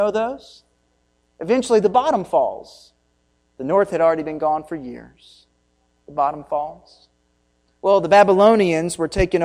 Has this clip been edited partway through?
no; 0 cuts

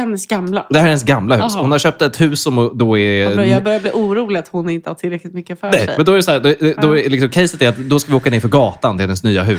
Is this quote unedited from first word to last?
yes; 0 cuts

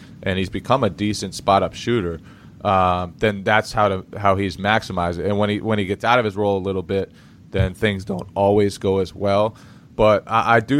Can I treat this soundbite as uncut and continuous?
yes; 0 cuts

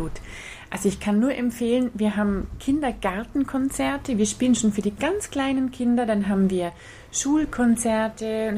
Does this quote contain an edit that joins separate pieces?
no; 0 cuts

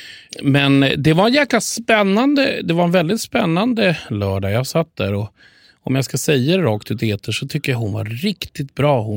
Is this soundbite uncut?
yes; 0 cuts

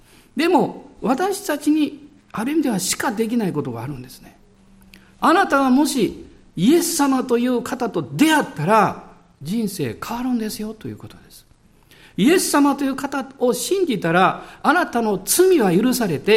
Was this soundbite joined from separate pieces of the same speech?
no; 0 cuts

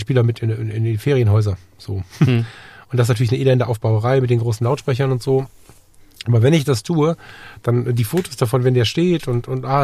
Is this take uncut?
yes; 0 cuts

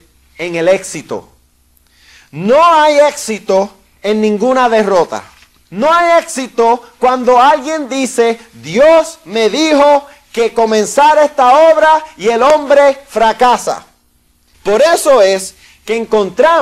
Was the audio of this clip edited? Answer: yes; 2 cuts; at 5.7 s, 14.5 s

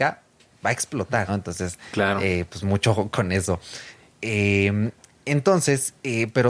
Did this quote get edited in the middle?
yes; 1 cut; at 1.3 s

